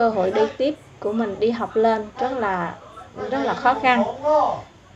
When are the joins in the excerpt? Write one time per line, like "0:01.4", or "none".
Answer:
none